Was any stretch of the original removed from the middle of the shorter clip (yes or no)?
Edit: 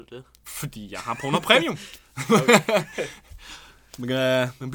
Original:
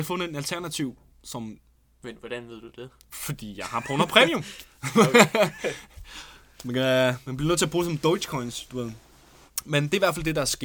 no